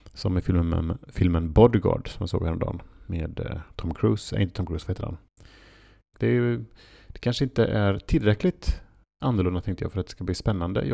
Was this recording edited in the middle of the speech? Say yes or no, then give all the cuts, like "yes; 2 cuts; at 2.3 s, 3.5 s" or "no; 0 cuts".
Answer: yes; 1 cut; at 6.1 s